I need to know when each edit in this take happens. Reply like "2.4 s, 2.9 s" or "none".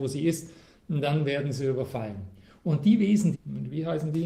3.3 s